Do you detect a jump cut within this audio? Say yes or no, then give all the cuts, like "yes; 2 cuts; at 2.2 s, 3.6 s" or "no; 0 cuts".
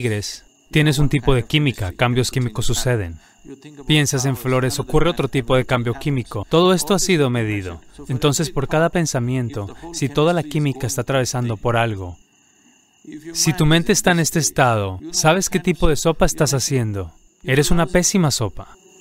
no; 0 cuts